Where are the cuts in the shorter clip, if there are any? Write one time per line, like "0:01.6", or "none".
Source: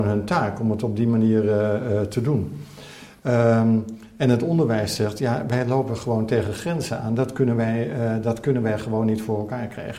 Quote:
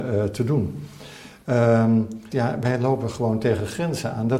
0:02.3